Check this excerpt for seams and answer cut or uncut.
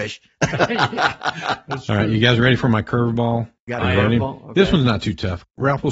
cut